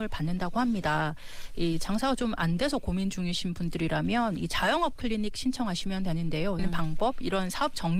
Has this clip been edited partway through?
yes; 1 cut; at 6.6 s

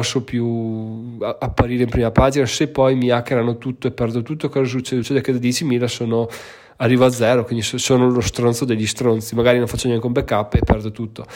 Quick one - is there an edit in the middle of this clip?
no; 0 cuts

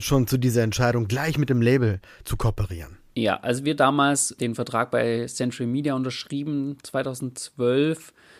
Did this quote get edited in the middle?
yes; 1 cut; at 4.4 s

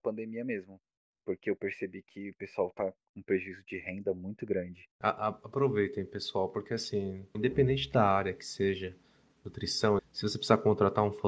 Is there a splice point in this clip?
yes; 3 cuts; at 4.9 s, 7.3 s, 10.0 s

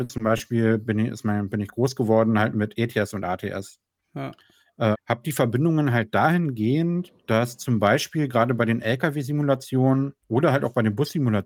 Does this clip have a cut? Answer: yes; 3 cuts; at 4.9 s, 7.2 s, 10.2 s

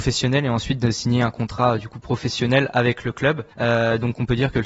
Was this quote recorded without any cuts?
no; 1 cut; at 3.5 s

